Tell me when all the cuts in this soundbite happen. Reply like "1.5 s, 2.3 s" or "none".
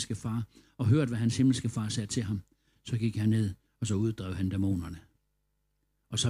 none